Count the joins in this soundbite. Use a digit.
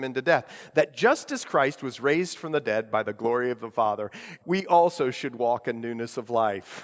1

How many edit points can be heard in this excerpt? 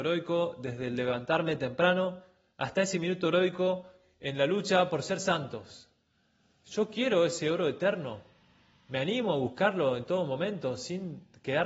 0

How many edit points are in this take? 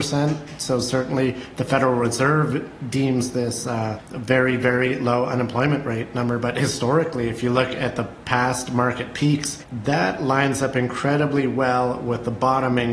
0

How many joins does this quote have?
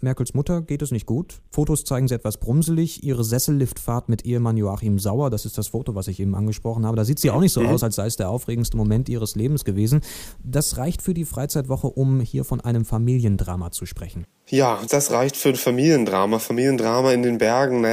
0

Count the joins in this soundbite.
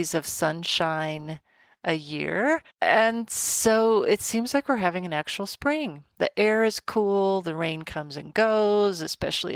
1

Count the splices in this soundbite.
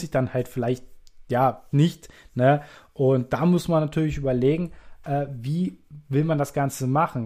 1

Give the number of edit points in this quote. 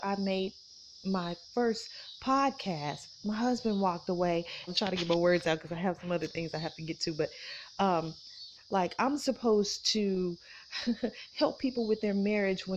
2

